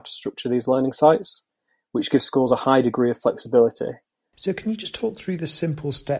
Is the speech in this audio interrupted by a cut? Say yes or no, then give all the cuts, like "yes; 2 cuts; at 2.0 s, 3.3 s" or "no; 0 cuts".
yes; 1 cut; at 4.3 s